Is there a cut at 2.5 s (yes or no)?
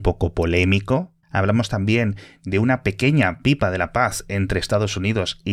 no